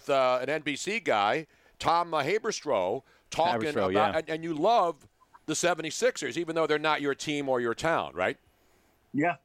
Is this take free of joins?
yes; 0 cuts

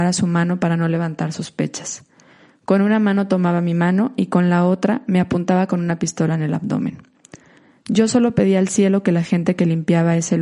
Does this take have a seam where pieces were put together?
no; 0 cuts

